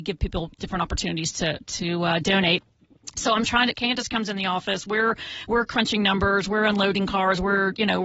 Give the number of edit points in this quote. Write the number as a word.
one